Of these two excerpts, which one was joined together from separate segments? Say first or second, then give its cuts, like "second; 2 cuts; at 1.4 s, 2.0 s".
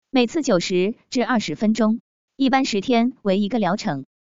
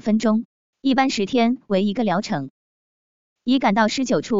second; 1 cut; at 3.4 s